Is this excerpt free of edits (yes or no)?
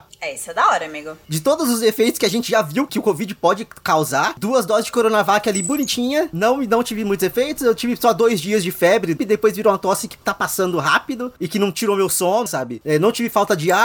no